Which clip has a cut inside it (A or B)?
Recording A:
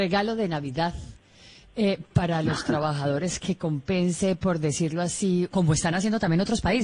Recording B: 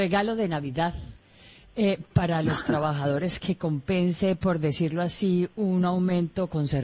A